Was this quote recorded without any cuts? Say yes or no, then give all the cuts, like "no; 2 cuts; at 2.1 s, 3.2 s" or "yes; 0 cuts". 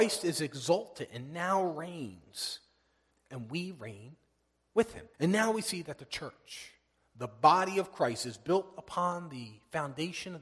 no; 2 cuts; at 3.1 s, 5.1 s